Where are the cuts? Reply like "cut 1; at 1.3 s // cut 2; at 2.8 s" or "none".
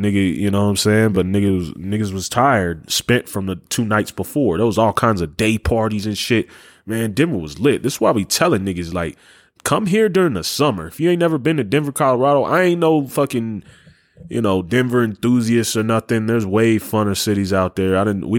none